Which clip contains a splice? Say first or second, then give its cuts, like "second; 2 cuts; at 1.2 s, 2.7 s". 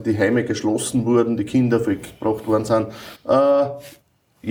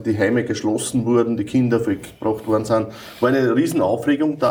first; 1 cut; at 3.1 s